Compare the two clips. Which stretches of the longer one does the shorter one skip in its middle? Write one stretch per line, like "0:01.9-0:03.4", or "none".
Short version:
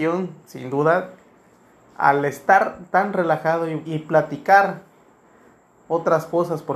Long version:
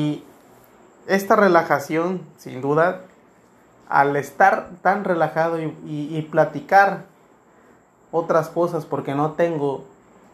0:05.8-0:06.1